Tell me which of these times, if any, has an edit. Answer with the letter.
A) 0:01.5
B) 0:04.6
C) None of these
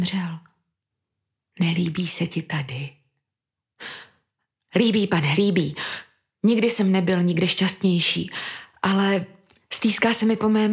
A